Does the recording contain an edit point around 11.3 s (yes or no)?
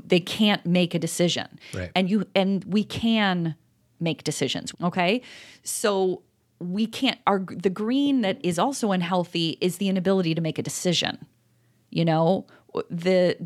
no